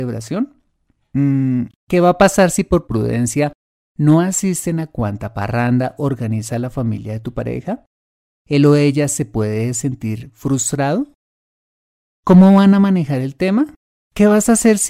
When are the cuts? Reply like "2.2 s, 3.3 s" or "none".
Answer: none